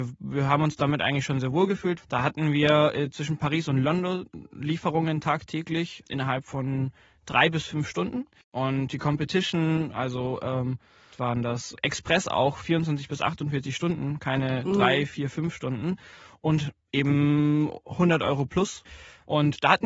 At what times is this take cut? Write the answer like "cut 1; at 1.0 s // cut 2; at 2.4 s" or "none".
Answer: cut 1; at 2.0 s // cut 2; at 8.4 s // cut 3; at 11.1 s